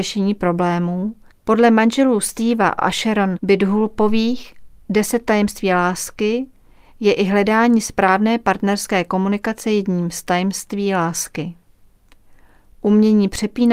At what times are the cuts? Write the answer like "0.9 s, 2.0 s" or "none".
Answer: 1.3 s